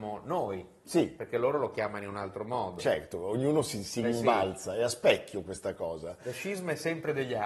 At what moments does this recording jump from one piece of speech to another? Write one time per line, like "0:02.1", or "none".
none